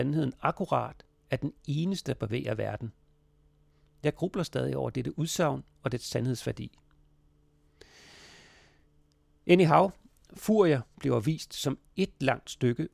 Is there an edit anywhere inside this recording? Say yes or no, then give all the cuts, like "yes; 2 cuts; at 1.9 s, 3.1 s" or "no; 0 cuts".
no; 0 cuts